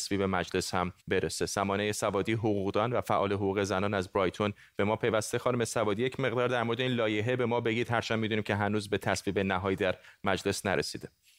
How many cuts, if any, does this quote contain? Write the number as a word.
one